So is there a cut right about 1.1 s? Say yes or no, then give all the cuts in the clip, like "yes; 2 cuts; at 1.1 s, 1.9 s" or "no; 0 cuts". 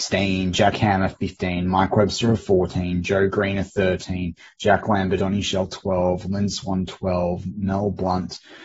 no; 1 cut; at 5.2 s